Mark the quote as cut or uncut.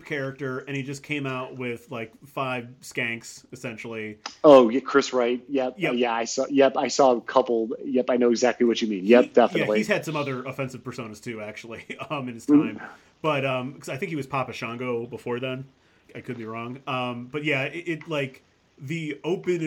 cut